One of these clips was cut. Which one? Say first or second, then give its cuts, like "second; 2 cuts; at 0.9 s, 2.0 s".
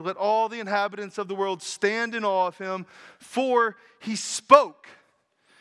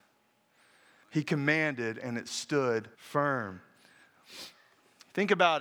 second; 2 cuts; at 1.0 s, 2.9 s